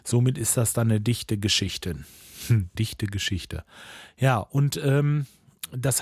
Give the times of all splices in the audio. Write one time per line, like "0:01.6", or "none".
0:02.7